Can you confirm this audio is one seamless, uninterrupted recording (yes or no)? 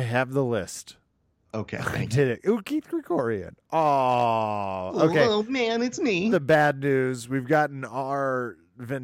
no